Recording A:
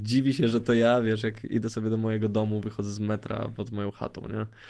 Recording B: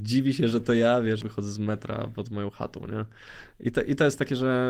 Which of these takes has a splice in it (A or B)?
B